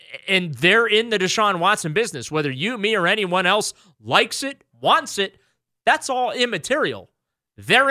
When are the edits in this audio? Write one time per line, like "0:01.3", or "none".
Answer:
0:04.7